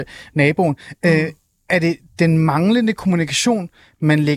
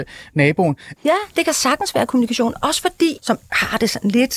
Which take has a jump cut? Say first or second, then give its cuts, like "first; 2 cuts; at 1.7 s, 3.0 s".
second; 2 cuts; at 1.0 s, 3.2 s